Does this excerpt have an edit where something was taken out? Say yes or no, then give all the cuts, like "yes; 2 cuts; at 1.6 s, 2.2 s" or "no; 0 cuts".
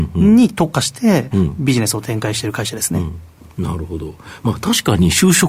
no; 0 cuts